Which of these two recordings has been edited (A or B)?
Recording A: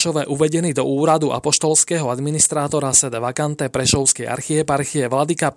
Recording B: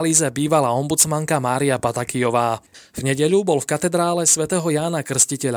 B